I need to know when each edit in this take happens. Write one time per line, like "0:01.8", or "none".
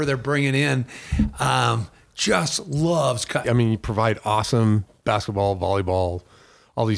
0:03.4